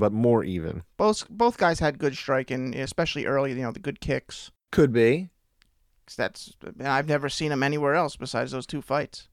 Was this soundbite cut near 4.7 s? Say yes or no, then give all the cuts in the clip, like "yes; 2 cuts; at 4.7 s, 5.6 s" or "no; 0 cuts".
yes; 1 cut; at 4.7 s